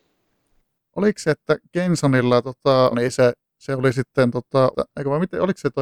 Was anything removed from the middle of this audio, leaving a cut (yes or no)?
yes